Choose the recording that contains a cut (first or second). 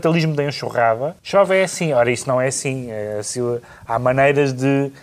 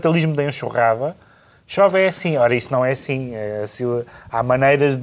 first